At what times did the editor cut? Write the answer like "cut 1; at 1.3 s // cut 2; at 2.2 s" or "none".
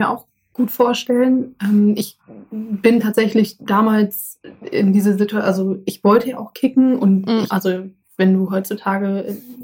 cut 1; at 7.5 s